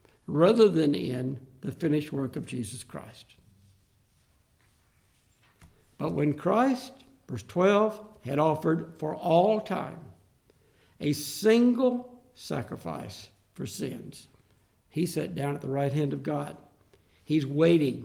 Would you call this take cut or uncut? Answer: uncut